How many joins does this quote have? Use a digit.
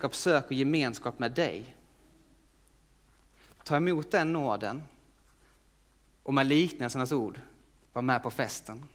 1